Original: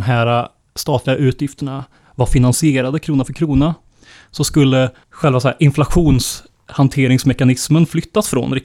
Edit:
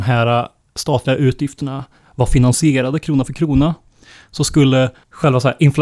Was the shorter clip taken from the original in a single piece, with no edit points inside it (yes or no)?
yes